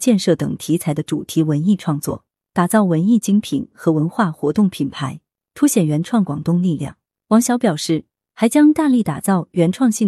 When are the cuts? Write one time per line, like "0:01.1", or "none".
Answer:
none